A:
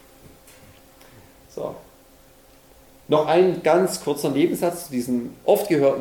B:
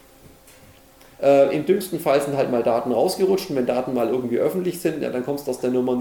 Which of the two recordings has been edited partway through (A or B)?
B